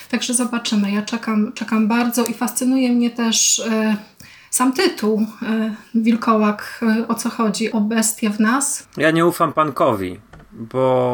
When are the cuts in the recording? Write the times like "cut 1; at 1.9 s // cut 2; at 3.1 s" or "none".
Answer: cut 1; at 7.7 s // cut 2; at 8.8 s